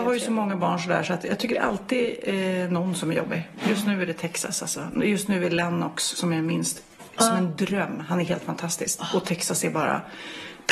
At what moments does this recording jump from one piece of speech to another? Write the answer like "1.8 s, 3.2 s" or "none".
none